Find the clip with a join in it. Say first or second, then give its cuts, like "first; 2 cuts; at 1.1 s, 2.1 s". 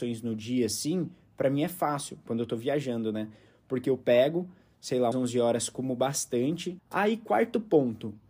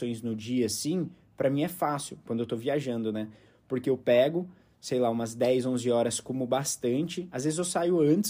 first; 2 cuts; at 5.1 s, 6.8 s